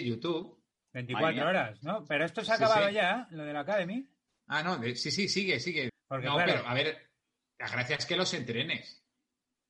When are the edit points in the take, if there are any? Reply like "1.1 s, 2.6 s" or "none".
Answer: 5.9 s